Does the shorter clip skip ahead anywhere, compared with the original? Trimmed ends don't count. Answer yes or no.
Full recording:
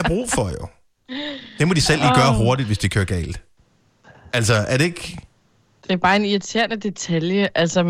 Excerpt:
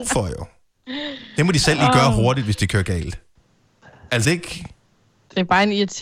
yes